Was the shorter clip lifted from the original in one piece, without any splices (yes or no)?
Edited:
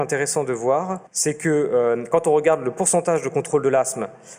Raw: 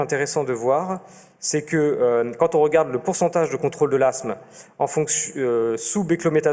no